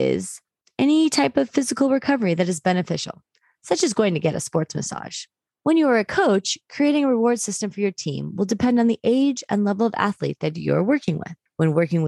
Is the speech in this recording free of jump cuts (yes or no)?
yes